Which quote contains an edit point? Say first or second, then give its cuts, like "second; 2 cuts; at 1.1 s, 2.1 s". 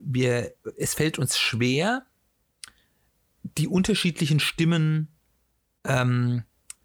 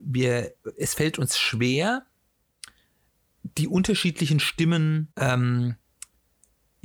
second; 1 cut; at 5.1 s